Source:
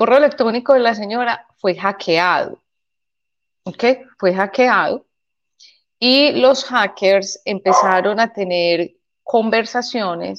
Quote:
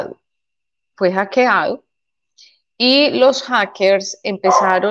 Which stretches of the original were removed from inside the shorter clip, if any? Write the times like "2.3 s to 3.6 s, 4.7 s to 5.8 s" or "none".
3.3 s to 4.2 s